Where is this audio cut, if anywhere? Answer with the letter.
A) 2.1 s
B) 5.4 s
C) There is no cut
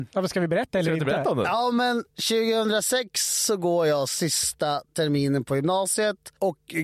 A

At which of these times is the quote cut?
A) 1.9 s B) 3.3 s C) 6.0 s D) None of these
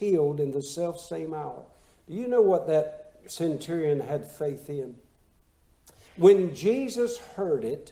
C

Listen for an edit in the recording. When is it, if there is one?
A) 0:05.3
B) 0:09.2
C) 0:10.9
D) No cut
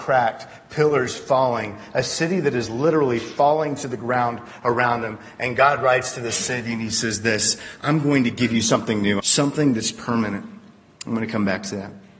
B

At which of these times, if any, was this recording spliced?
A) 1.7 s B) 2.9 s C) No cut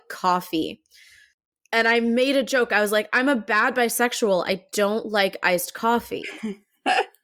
C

